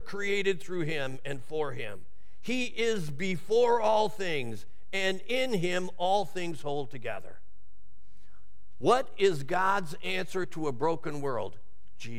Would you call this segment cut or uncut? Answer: uncut